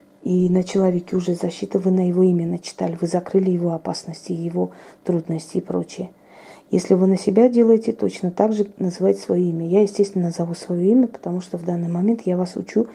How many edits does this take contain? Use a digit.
0